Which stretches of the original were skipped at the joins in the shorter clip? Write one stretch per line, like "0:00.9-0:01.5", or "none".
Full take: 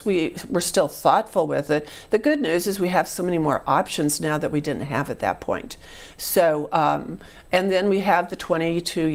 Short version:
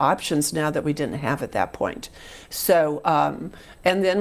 none